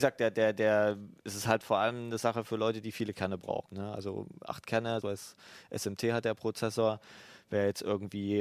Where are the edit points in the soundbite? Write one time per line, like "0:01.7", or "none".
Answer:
0:03.7
0:05.0